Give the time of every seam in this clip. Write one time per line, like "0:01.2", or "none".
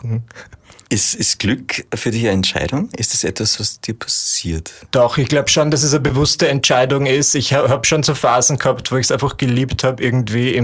0:03.6